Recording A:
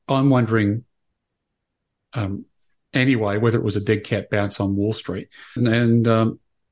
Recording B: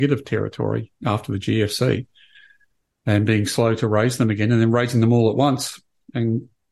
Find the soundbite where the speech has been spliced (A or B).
A